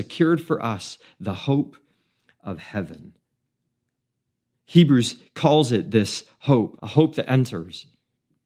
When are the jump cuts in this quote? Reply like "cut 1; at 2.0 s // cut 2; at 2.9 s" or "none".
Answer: cut 1; at 6.8 s

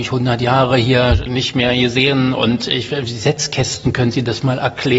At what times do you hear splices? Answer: cut 1; at 1.3 s

